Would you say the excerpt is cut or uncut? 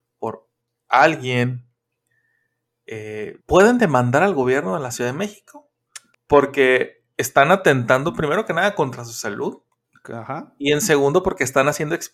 cut